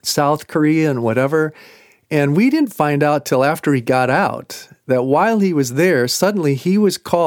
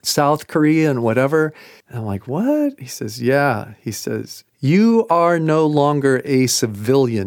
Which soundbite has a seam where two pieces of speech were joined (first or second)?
second